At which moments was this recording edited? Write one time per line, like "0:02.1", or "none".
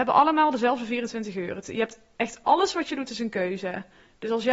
none